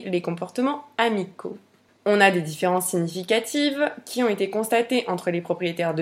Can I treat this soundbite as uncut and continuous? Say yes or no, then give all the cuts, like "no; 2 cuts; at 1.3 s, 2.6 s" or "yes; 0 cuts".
yes; 0 cuts